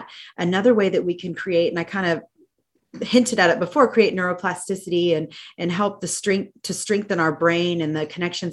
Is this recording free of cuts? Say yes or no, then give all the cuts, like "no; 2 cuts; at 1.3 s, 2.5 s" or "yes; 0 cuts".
yes; 0 cuts